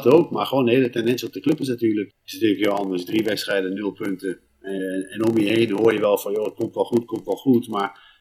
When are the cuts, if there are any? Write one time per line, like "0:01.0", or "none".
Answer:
0:02.1